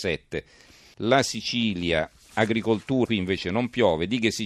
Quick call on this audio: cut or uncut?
cut